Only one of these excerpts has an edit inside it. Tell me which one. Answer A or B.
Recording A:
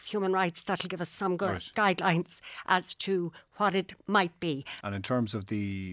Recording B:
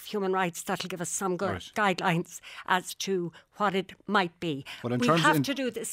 A